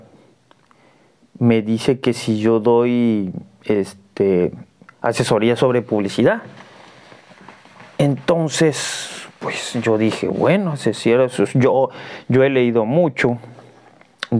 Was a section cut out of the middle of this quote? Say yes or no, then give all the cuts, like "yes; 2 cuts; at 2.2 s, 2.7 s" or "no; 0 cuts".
no; 0 cuts